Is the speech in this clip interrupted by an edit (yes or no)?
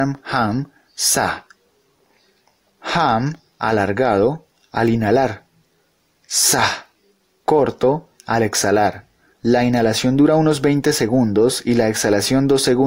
no